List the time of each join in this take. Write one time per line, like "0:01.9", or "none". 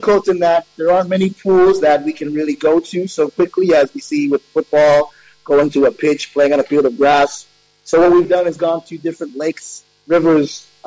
0:08.2